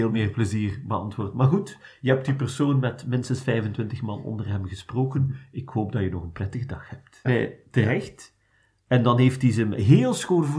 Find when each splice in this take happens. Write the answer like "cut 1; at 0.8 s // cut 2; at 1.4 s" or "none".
cut 1; at 7.2 s